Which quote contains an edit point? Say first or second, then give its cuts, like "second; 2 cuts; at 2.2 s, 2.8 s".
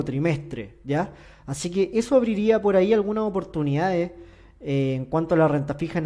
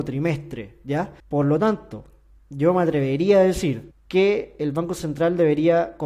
second; 2 cuts; at 1.2 s, 3.9 s